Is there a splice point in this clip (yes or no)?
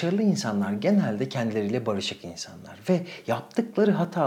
no